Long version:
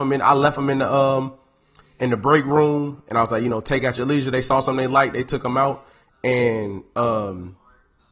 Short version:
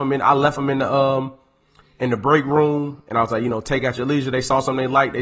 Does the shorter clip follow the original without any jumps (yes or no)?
yes